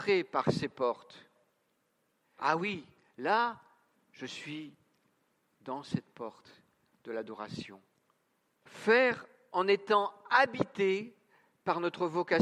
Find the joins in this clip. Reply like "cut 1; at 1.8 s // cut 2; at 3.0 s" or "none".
cut 1; at 2.4 s // cut 2; at 8.6 s

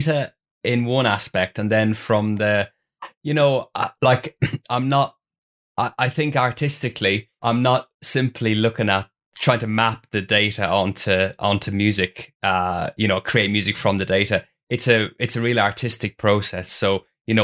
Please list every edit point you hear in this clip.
none

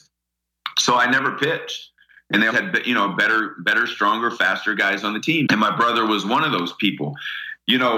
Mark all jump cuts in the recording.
cut 1; at 2.5 s // cut 2; at 5.5 s

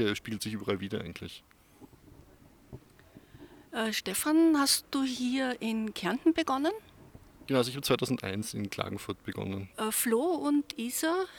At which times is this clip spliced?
cut 1; at 9.7 s

